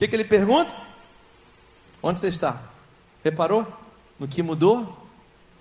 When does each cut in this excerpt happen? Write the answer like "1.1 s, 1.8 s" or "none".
1.9 s